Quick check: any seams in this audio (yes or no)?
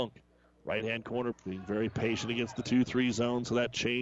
yes